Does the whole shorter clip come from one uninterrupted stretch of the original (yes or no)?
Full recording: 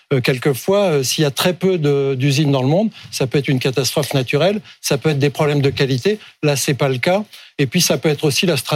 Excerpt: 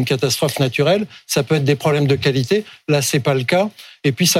yes